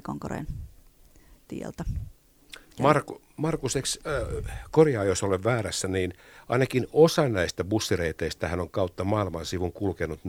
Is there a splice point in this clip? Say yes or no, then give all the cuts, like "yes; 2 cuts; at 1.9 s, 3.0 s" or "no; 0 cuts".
no; 0 cuts